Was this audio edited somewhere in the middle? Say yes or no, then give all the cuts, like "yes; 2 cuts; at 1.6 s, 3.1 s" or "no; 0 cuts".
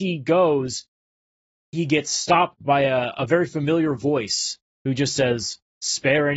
no; 0 cuts